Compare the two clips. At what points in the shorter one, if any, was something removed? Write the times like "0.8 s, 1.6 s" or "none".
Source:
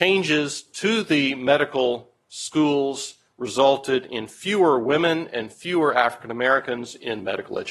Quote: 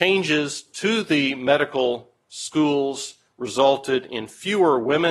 none